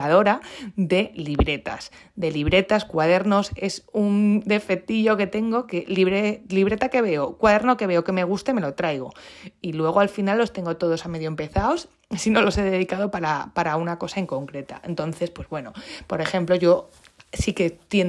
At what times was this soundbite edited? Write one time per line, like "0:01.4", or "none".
none